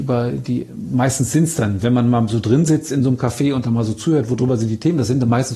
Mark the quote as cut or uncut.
uncut